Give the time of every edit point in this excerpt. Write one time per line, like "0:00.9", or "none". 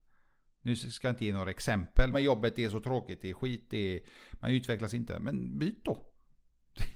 0:02.1